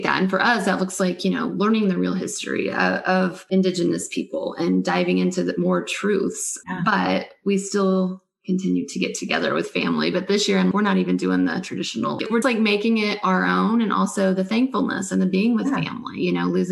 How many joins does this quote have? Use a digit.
2